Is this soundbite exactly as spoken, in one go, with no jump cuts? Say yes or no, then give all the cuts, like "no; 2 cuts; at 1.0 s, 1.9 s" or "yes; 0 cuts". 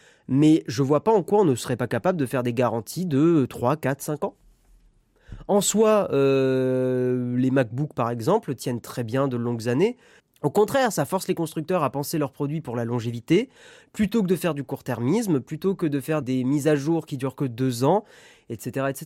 no; 2 cuts; at 10.2 s, 16.2 s